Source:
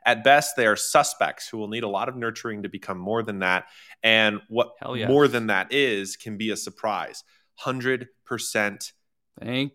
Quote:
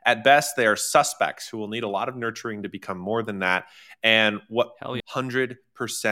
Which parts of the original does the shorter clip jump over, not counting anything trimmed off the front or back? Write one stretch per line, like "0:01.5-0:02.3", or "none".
0:05.0-0:07.5